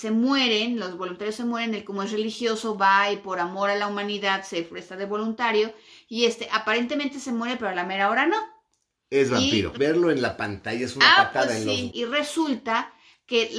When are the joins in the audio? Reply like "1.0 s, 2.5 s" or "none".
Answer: 9.8 s, 11.9 s